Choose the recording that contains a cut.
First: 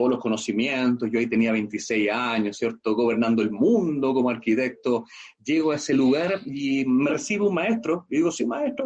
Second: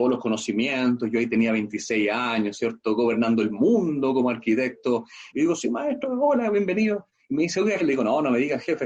second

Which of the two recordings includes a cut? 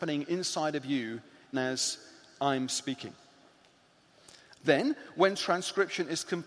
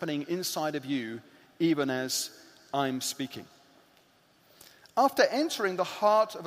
first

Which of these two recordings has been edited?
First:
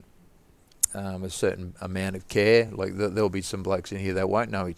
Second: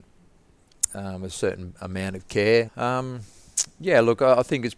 second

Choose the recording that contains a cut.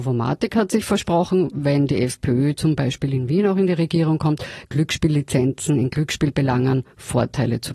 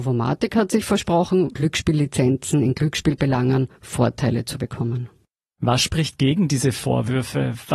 second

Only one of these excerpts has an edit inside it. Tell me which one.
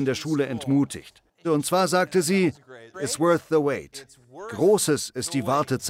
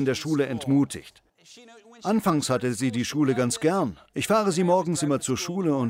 first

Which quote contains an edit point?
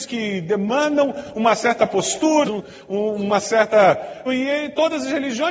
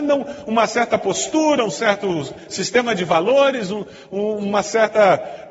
first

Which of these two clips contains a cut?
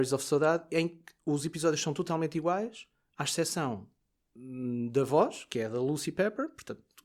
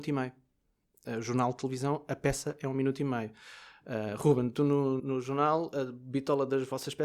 second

